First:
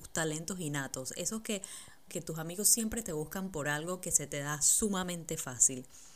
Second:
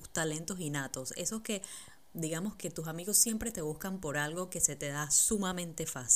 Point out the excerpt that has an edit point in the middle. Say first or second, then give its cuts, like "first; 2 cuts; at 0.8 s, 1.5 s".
first; 1 cut; at 2.1 s